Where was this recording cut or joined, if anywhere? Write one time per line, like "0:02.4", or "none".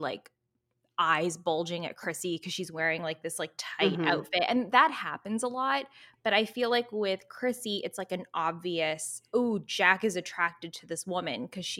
none

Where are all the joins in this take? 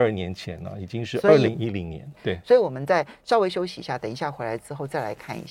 0:02.1

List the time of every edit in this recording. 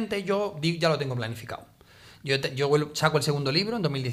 none

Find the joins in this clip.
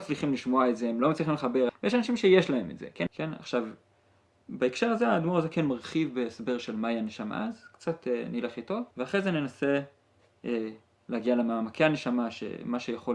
0:01.7
0:03.1
0:08.9

